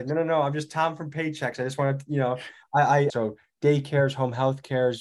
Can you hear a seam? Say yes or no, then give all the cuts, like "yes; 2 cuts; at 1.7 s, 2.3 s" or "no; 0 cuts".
yes; 1 cut; at 3.1 s